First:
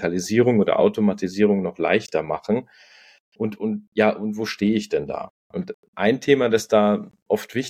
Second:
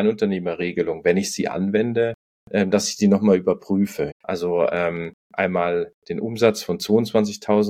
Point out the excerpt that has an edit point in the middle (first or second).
second